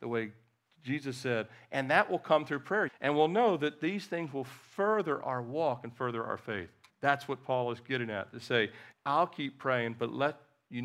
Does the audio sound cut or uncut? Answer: cut